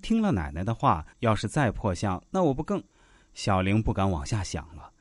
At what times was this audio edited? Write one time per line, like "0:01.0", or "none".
0:01.1
0:02.9